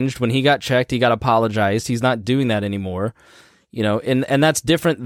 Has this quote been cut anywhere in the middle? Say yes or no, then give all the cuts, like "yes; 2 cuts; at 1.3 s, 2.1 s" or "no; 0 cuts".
no; 0 cuts